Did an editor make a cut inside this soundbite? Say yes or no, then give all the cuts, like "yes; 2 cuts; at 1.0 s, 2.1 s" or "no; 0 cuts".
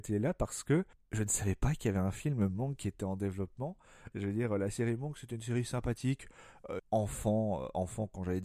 yes; 2 cuts; at 4.1 s, 6.8 s